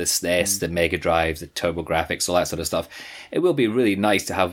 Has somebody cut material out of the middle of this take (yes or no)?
no